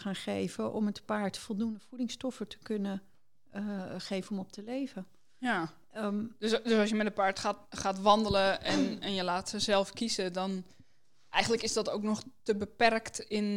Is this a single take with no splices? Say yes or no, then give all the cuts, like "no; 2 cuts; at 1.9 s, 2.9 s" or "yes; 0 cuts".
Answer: yes; 0 cuts